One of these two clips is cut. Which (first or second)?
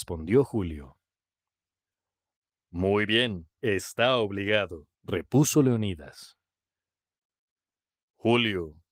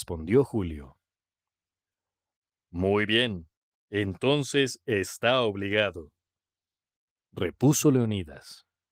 first